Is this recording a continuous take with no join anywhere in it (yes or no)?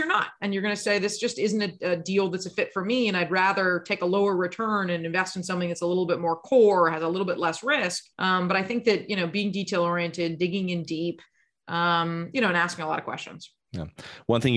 no